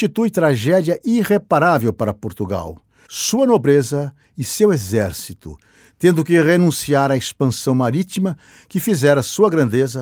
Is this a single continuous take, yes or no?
no